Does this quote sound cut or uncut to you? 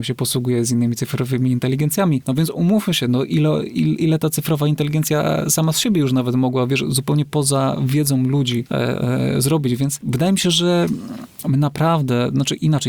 uncut